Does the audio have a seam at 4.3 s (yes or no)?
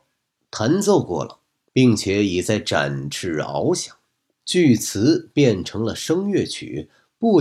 yes